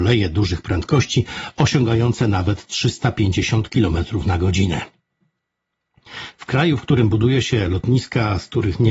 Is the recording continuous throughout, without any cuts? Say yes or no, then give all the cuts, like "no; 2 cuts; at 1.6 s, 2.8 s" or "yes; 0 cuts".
yes; 0 cuts